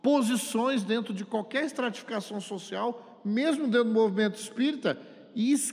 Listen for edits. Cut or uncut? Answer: uncut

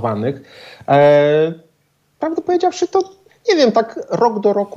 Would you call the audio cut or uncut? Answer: uncut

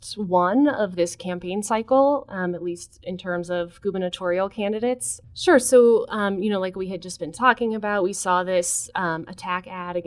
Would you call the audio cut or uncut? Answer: cut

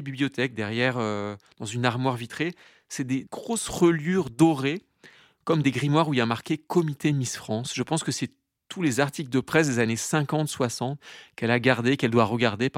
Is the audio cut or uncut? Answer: uncut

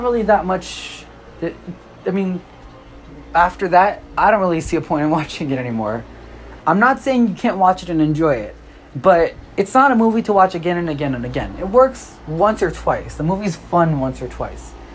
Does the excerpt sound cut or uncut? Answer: cut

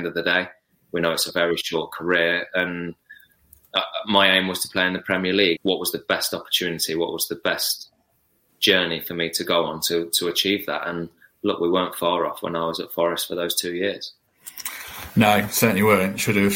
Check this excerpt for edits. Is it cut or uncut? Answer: cut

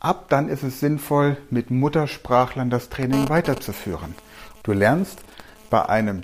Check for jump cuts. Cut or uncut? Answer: cut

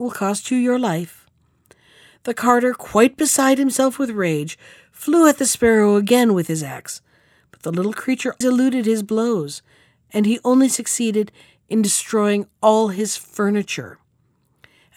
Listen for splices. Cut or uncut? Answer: cut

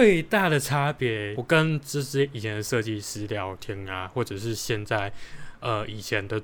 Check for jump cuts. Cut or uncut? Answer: cut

